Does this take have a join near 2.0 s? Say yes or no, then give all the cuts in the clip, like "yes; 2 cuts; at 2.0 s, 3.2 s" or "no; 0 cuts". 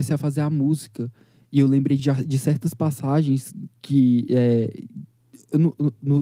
no; 0 cuts